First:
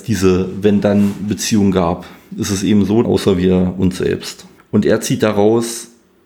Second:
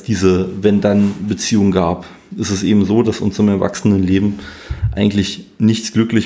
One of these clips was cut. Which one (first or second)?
first